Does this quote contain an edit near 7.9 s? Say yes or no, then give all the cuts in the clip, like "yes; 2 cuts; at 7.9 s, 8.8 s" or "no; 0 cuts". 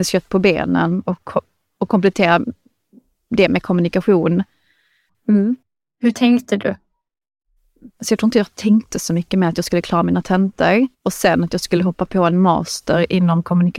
yes; 3 cuts; at 5.1 s, 7.9 s, 10.9 s